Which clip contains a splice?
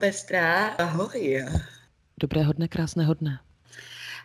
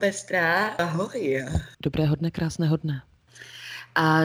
second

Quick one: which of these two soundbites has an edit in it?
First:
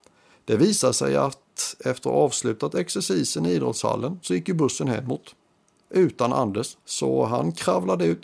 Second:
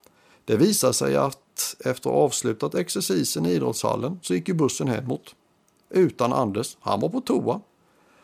first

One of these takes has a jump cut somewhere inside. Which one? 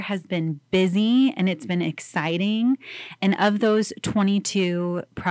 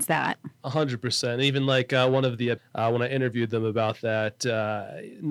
second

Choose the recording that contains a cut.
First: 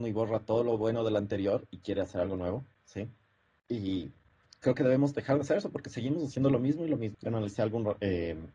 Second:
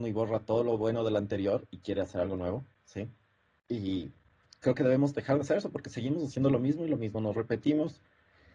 first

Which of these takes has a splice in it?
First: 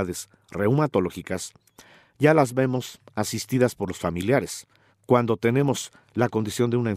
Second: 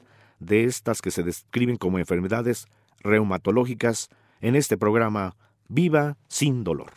first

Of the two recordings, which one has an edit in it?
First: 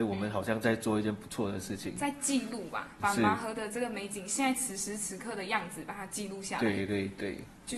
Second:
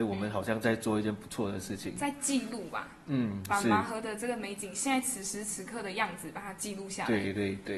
first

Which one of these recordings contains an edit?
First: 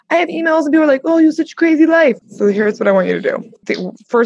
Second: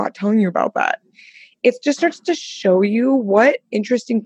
first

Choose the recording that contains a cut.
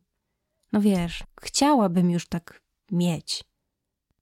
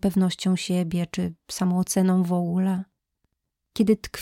first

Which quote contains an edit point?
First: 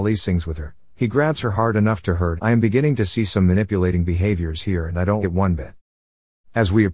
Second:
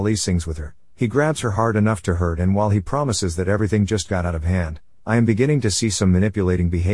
first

